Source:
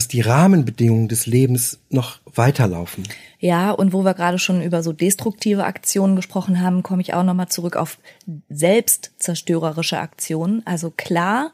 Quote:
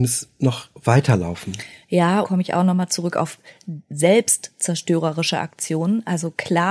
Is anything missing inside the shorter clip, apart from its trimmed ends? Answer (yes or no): yes